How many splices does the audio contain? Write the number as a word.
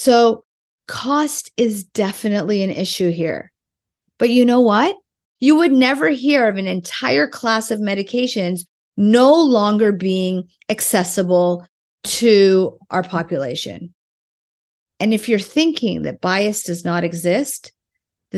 one